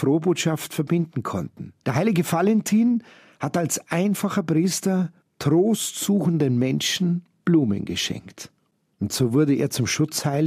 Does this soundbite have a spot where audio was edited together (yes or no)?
yes